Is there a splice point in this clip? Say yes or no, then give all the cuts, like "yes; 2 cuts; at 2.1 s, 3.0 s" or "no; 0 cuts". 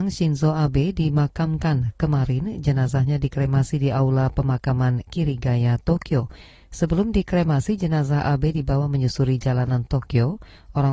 no; 0 cuts